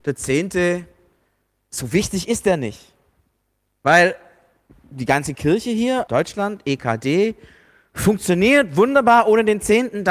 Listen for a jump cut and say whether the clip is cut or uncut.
cut